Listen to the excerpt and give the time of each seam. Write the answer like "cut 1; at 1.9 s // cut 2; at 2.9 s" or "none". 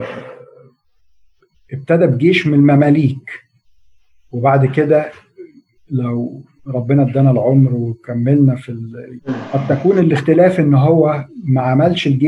cut 1; at 9.2 s